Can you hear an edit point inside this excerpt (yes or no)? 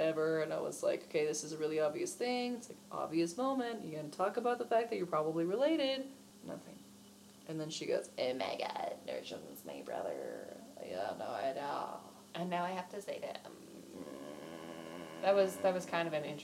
no